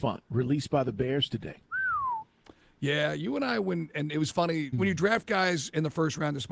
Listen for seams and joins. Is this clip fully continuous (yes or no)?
no